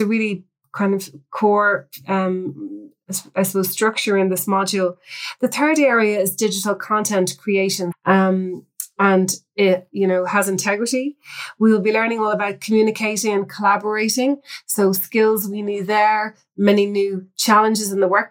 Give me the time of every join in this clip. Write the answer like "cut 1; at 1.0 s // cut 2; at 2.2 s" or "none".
cut 1; at 7.9 s